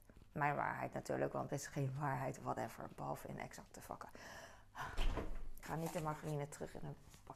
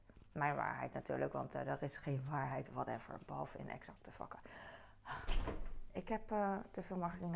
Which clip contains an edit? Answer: first; 2 cuts; at 1.5 s, 5.6 s

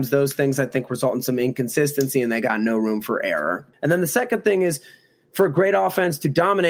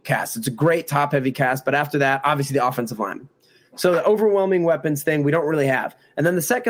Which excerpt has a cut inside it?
first; 1 cut; at 3.7 s

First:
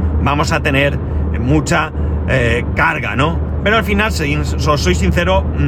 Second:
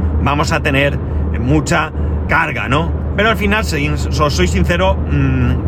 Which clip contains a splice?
second; 1 cut; at 2.3 s

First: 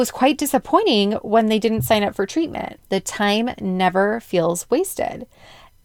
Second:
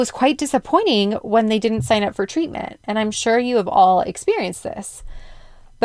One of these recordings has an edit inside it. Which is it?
first; 1 cut; at 2.8 s

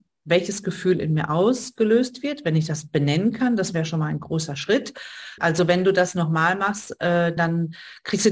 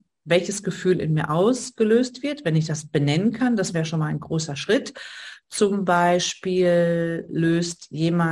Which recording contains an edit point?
first; 2 cuts; at 5.4 s, 7.4 s

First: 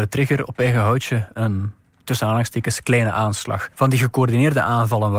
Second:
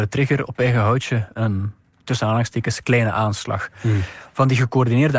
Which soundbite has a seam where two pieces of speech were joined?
first; 1 cut; at 3.7 s

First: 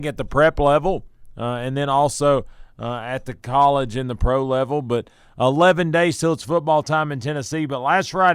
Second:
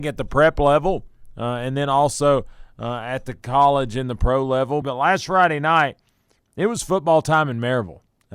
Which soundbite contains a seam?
second; 1 cut; at 4.8 s

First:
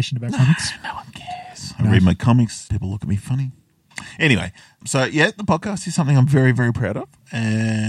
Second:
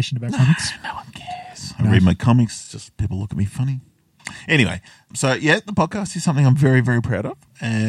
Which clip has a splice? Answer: first; 1 cut; at 2.6 s

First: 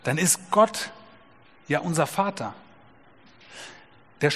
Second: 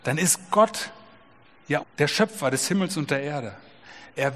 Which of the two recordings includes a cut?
second; 1 cut; at 1.8 s

